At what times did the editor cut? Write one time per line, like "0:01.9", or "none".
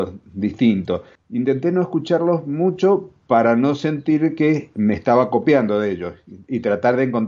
0:01.2